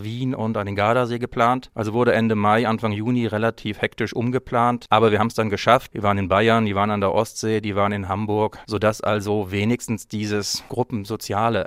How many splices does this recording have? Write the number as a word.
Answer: one